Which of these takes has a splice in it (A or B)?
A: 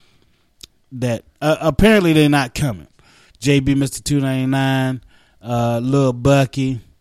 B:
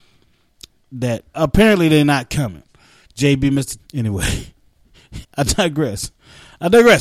B